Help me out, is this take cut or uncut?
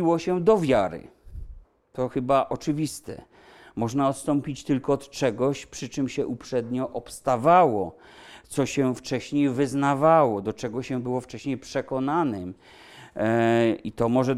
uncut